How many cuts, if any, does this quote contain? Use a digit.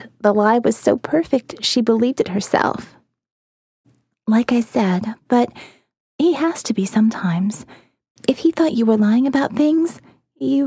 1